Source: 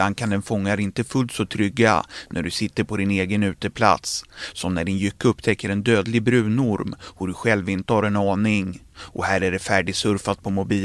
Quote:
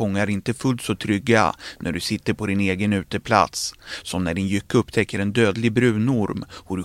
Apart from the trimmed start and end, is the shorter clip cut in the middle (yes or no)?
no